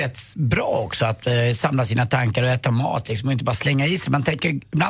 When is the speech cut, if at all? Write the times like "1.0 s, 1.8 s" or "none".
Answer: none